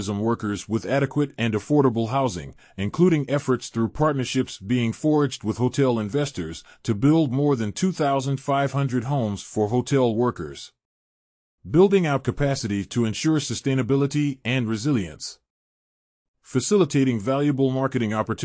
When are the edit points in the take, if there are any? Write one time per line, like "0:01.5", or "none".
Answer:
0:11.6
0:16.3